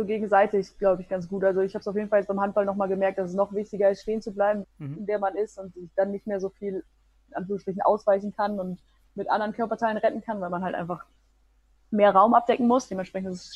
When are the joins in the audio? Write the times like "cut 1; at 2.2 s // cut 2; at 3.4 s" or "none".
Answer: cut 1; at 4.6 s